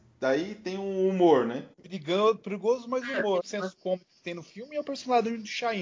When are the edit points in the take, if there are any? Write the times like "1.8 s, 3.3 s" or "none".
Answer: 1.7 s, 3.4 s